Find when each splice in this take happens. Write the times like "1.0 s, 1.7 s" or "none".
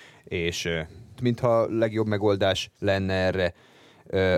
1.2 s, 2.8 s